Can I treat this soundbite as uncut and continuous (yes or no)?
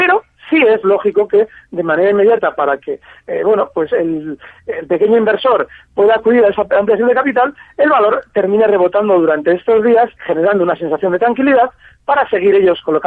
no